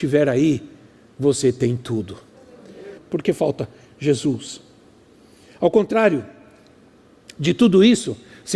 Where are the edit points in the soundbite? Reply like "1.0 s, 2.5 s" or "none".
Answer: 3.0 s